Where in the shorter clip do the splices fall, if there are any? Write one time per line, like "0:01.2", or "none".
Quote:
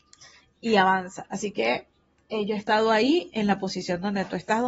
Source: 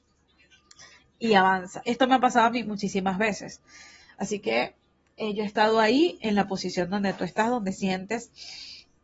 0:01.2